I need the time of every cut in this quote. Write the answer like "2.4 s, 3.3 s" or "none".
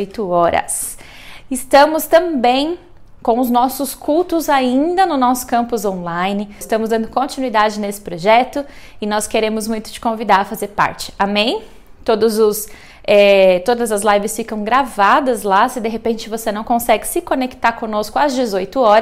6.6 s